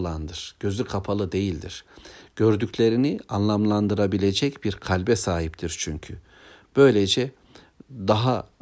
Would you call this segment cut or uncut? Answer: uncut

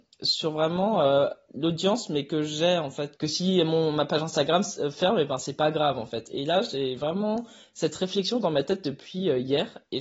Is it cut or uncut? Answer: cut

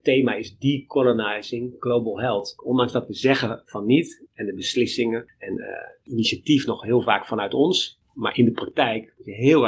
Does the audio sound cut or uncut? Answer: cut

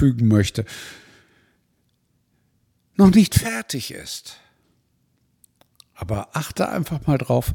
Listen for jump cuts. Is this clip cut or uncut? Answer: uncut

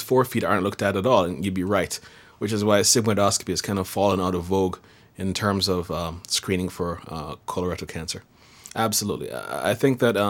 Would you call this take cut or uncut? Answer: cut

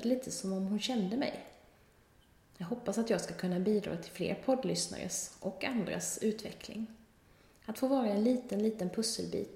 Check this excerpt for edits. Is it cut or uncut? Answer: uncut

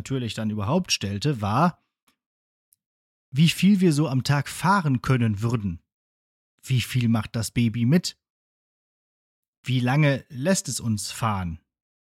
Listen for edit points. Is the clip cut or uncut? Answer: uncut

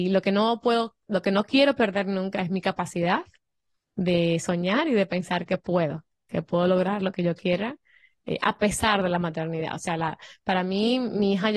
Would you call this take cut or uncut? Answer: uncut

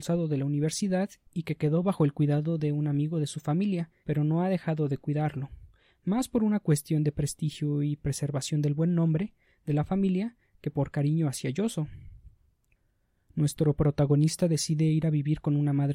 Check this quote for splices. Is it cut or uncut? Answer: cut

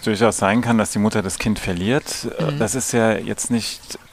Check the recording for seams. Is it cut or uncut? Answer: uncut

